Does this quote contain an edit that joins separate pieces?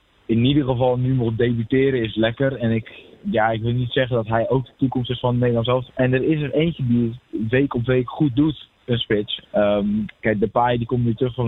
yes; 2 cuts; at 5.9 s, 9.4 s

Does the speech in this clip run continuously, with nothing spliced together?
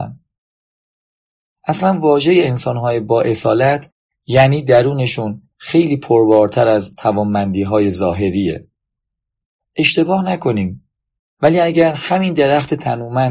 no; 1 cut; at 11.2 s

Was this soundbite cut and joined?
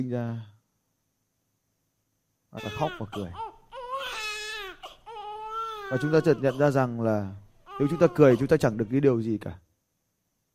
yes; 1 cut; at 2.6 s

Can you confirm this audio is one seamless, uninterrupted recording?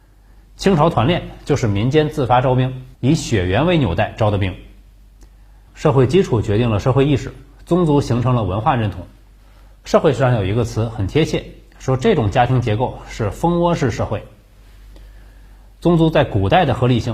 no; 2 cuts; at 2.9 s, 5.7 s

